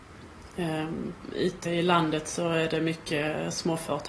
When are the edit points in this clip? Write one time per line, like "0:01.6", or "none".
0:01.7